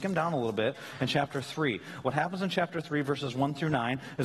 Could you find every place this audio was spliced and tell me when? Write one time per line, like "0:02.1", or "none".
none